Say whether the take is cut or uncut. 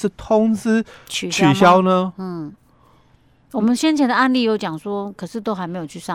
uncut